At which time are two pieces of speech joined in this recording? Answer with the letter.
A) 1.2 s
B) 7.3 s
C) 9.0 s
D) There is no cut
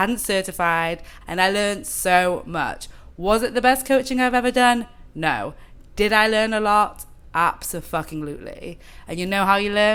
A